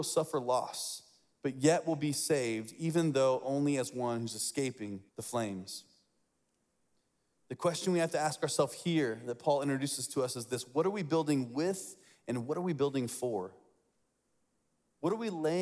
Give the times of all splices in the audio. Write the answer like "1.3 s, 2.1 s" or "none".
5.1 s